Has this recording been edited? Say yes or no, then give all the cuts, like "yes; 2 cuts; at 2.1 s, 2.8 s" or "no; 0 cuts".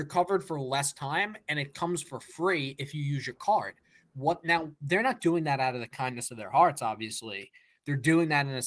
no; 0 cuts